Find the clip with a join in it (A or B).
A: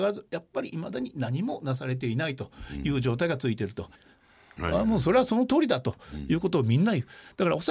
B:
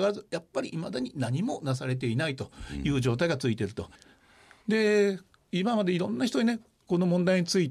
A